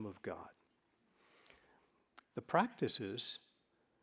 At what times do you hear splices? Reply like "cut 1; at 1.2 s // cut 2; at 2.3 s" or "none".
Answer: cut 1; at 2.2 s